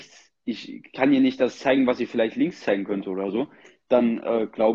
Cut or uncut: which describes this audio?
uncut